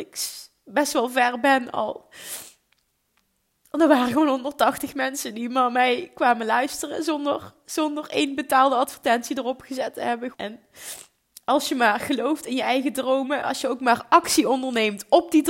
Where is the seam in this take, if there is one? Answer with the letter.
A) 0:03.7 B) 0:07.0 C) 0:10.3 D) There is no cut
C